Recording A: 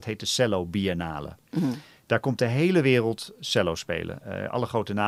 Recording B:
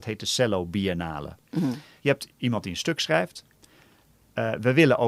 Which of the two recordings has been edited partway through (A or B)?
B